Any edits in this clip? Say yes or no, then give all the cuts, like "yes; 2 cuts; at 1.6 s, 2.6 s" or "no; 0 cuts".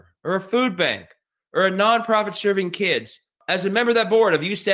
no; 0 cuts